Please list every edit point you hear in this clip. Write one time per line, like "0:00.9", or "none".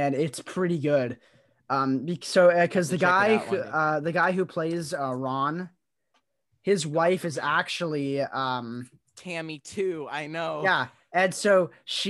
none